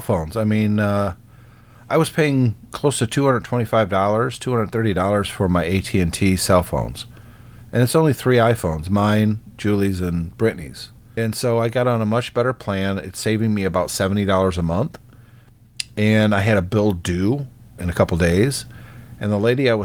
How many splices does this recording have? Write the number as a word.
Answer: two